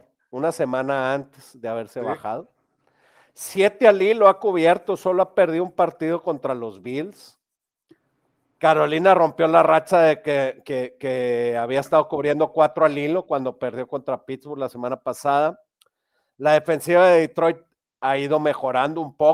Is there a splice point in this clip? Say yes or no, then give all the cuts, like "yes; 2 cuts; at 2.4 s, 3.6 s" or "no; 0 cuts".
no; 0 cuts